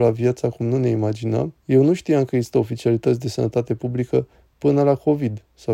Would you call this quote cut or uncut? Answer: cut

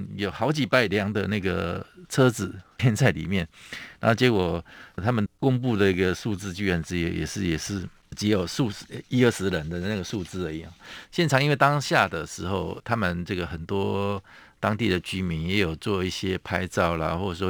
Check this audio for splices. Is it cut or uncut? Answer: cut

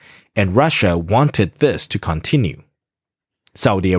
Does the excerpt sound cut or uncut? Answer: uncut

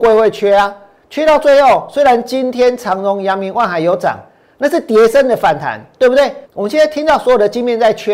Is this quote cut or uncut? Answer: cut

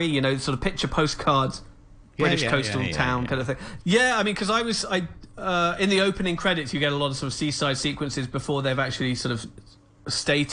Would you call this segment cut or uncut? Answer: cut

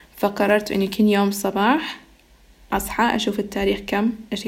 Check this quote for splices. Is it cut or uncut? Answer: uncut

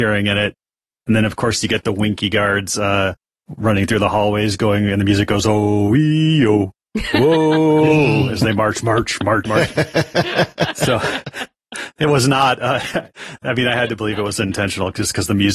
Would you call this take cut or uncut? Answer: cut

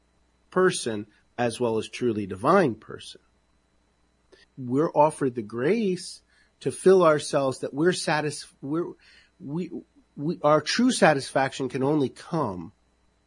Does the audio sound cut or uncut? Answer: cut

